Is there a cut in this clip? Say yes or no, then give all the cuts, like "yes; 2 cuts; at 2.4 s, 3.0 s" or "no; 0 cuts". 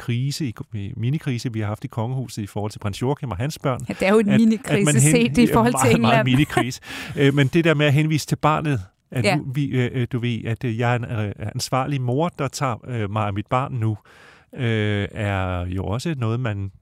no; 0 cuts